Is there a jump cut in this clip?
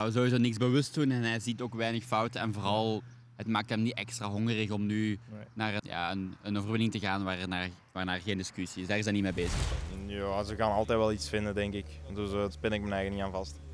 yes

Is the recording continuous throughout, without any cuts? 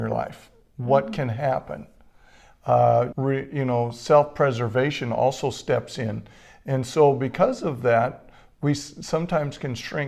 no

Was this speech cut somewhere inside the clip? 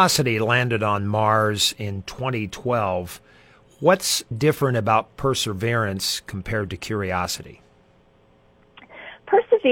yes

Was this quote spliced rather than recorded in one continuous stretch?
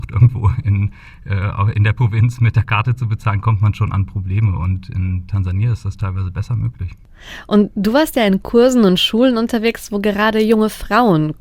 no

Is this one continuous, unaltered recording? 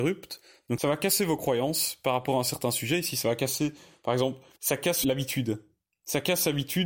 no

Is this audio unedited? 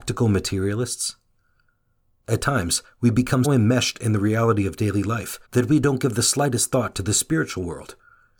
no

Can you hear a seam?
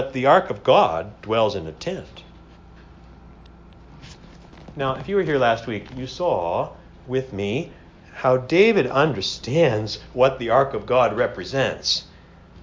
no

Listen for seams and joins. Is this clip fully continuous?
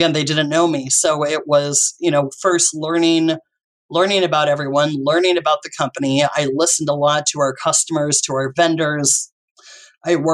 yes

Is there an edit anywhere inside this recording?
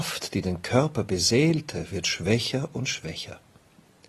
no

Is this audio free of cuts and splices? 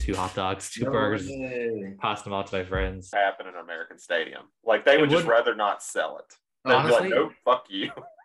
no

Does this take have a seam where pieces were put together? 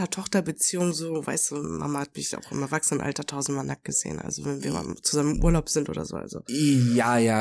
no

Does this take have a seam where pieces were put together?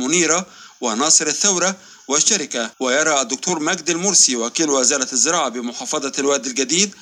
yes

